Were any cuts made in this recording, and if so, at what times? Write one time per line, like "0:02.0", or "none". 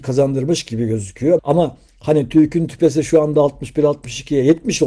0:01.4